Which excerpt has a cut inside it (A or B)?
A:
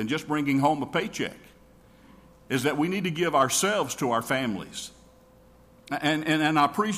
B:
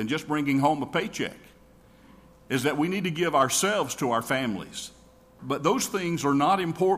B